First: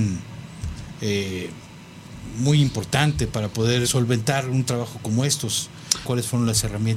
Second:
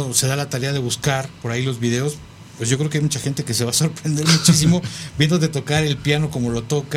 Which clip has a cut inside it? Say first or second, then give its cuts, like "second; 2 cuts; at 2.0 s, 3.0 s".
first; 2 cuts; at 3.8 s, 6.0 s